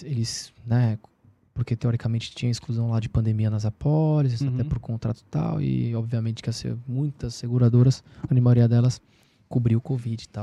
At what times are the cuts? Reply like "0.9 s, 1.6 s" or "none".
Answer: none